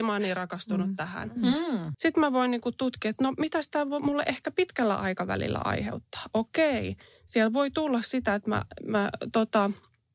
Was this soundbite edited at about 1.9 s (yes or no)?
yes